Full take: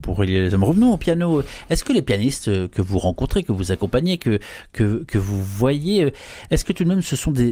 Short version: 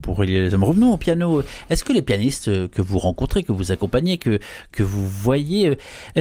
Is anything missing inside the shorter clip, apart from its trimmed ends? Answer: yes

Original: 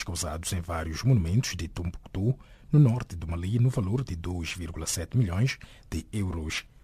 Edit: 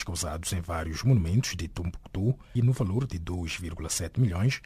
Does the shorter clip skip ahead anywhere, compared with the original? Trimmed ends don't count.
yes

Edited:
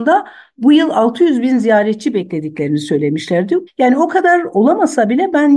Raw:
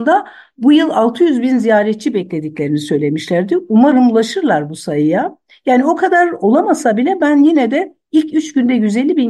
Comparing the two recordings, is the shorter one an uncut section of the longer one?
no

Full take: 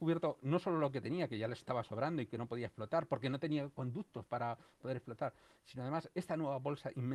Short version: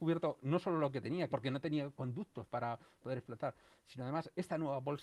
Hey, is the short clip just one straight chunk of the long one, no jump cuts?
no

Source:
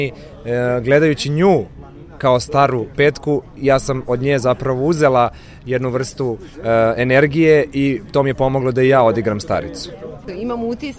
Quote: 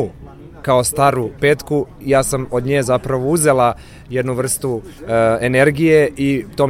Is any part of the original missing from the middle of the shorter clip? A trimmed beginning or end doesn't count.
no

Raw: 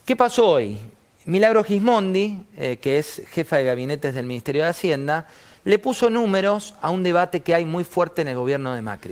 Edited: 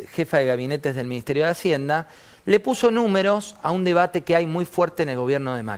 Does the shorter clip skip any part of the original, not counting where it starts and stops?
no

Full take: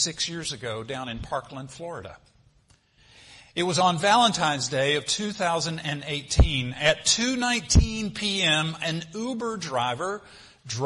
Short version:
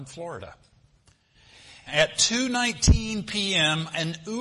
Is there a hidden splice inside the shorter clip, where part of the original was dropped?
yes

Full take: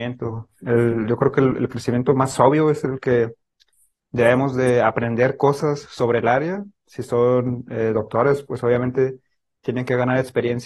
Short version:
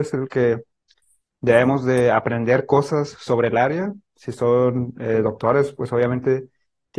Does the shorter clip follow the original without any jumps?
yes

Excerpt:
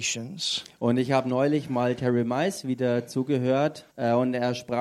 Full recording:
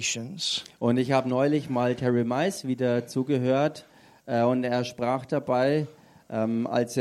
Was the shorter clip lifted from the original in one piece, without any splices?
no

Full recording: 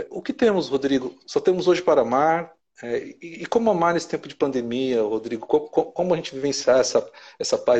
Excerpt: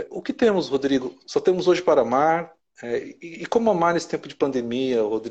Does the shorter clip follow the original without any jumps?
yes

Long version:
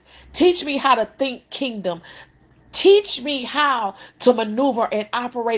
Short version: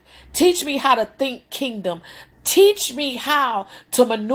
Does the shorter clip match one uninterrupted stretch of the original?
no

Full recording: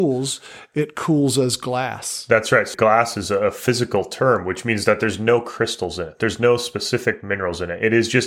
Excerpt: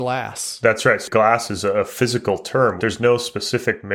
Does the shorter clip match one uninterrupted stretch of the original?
no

